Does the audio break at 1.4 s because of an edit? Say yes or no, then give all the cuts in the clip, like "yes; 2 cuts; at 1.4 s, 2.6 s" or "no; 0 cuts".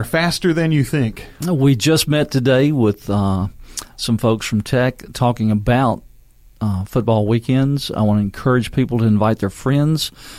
no; 0 cuts